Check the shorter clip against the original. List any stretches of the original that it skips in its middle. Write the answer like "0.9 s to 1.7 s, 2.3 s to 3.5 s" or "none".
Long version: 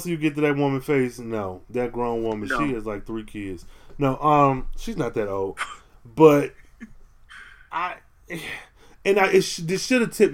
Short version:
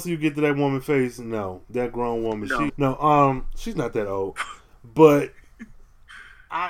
2.7 s to 3.9 s